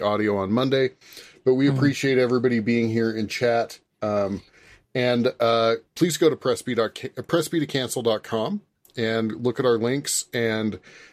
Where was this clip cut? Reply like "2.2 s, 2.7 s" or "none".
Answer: none